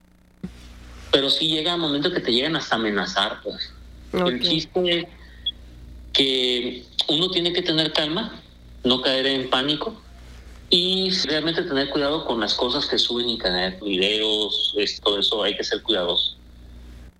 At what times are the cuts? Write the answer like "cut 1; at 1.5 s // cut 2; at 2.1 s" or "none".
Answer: cut 1; at 11.2 s // cut 2; at 13.8 s // cut 3; at 15.0 s